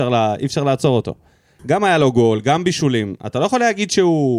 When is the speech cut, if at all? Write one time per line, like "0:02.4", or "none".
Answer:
0:01.6